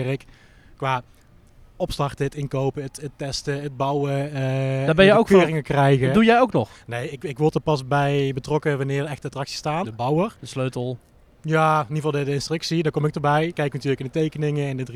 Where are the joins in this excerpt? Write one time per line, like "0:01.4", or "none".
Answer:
0:09.8